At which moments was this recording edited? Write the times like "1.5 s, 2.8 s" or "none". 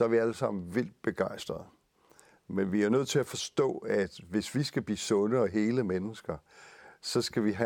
none